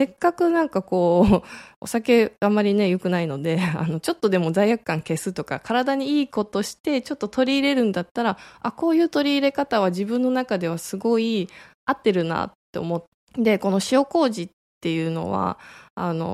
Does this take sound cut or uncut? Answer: cut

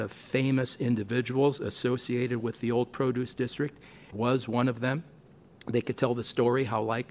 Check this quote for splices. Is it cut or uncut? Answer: cut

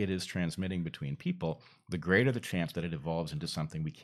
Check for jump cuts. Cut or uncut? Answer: uncut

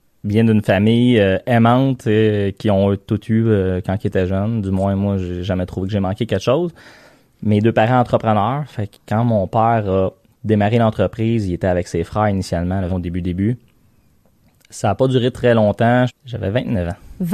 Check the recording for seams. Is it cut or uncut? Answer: cut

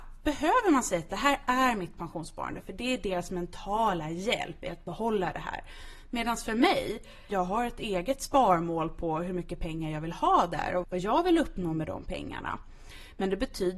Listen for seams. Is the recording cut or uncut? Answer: cut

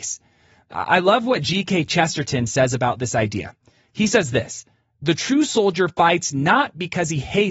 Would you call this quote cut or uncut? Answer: uncut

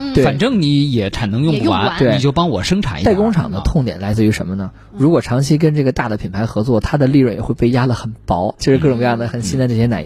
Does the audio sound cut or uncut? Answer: cut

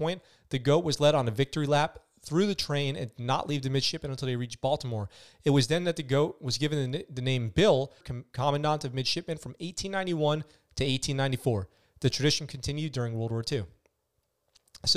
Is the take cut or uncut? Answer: cut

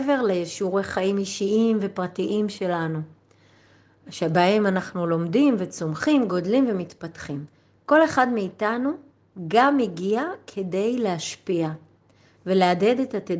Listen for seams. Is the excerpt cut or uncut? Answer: uncut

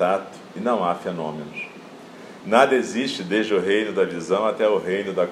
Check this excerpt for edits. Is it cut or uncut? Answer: uncut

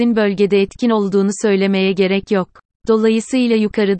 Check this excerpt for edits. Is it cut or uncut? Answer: cut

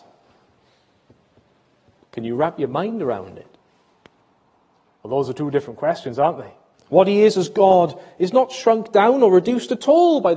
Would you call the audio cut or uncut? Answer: cut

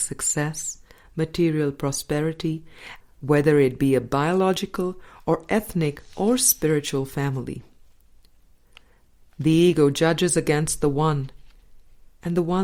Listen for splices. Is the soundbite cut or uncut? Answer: cut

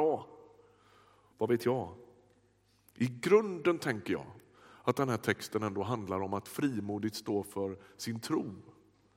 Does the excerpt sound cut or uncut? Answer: cut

